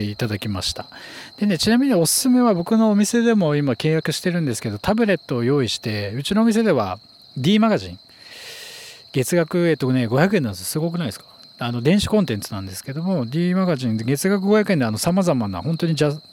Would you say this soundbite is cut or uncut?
uncut